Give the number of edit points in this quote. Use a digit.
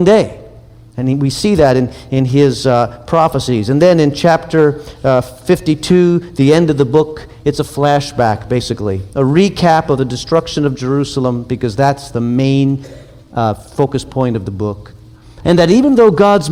1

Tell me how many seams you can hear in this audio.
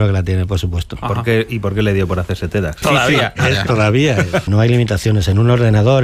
2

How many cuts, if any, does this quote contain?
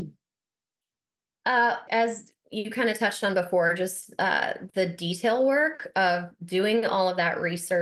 1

